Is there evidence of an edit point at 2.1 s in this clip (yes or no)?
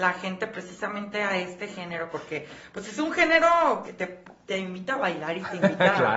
no